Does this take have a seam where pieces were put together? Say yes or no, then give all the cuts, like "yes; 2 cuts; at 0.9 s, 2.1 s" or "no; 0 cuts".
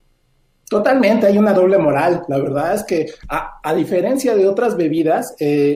no; 0 cuts